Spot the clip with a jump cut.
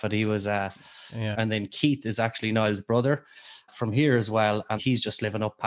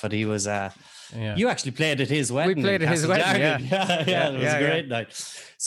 first; 3 cuts; at 1.3 s, 3.7 s, 4.8 s

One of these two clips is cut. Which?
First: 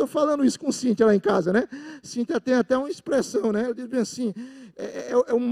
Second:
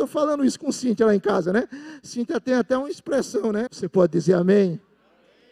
second; 1 cut; at 3.7 s

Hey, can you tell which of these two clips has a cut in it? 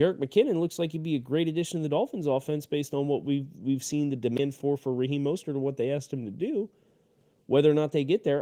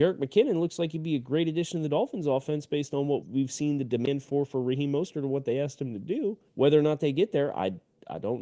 second; 2 cuts; at 3.2 s, 6.5 s

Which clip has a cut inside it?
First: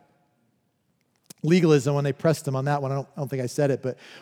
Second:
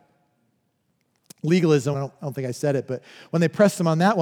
second; 1 cut; at 1.9 s

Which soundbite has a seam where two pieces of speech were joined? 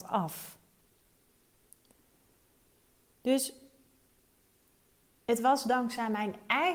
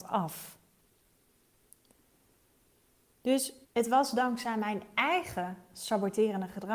second; 1 cut; at 3.6 s

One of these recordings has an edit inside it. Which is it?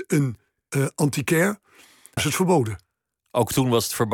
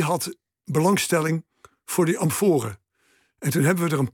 first; 1 cut; at 2.2 s

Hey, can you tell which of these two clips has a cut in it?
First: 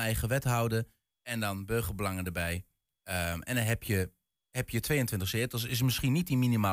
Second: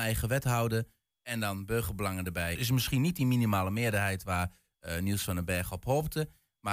second; 1 cut; at 2.6 s

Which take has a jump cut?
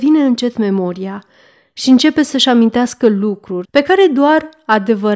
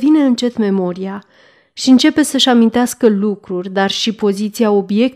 first; 1 cut; at 3.6 s

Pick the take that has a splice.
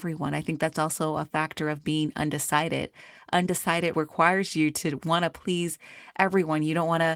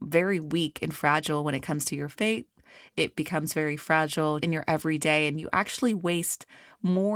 second; 1 cut; at 4.4 s

